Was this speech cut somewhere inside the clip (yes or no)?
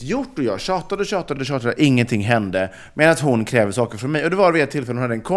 no